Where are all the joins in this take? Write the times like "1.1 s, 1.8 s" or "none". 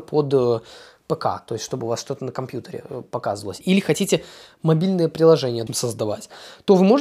3.6 s, 5.7 s